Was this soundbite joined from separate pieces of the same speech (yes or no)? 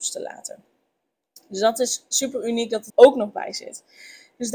yes